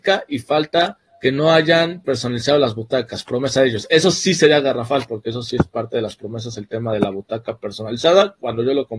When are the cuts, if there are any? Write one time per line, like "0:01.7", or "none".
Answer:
0:01.1